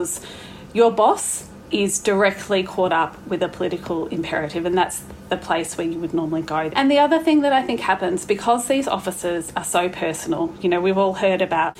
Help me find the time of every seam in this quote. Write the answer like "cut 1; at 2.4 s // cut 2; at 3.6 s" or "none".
cut 1; at 6.7 s